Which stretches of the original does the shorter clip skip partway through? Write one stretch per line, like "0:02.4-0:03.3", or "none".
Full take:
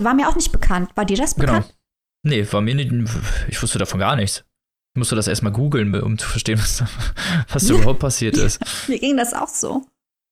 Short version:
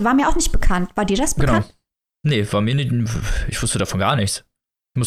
none